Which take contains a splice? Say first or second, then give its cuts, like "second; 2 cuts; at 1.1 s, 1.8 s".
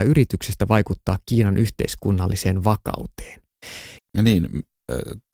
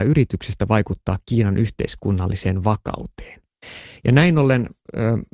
first; 1 cut; at 4.0 s